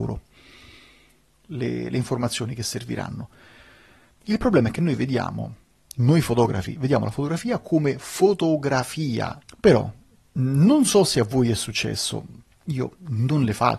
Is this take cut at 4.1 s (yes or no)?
yes